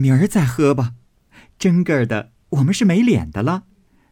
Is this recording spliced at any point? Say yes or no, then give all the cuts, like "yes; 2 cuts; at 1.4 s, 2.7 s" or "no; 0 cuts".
yes; 1 cut; at 1.2 s